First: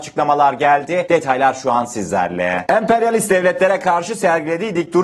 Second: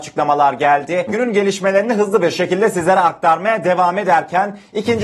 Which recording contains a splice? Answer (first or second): second